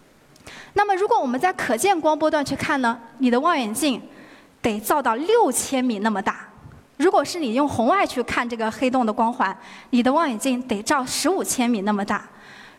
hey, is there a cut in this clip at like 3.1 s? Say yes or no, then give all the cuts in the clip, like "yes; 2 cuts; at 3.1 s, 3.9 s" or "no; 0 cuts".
no; 0 cuts